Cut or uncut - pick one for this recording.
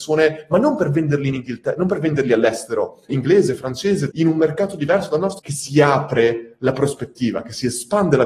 cut